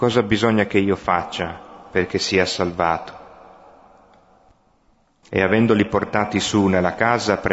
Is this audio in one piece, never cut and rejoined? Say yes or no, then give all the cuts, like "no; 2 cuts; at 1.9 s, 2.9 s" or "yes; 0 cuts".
no; 1 cut; at 5.2 s